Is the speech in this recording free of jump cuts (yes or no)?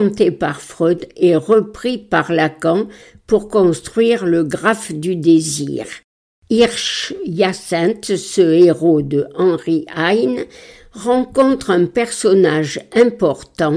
yes